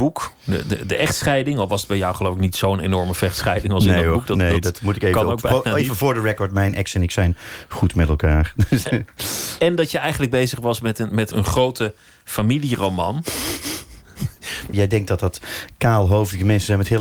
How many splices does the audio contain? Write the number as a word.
two